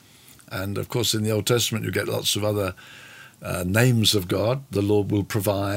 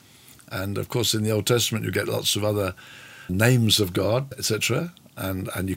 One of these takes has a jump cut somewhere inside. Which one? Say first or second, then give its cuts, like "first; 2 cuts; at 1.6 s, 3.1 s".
second; 2 cuts; at 3.3 s, 4.3 s